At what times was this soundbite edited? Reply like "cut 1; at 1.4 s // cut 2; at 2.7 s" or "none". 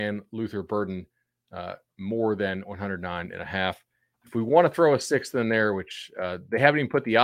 none